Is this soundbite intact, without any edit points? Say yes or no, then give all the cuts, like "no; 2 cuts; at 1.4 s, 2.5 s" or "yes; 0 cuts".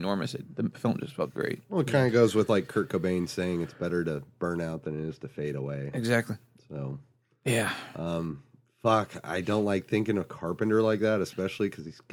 yes; 0 cuts